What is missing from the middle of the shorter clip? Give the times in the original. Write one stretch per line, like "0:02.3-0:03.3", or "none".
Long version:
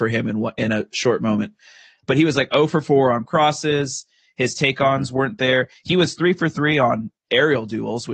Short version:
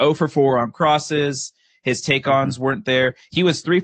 none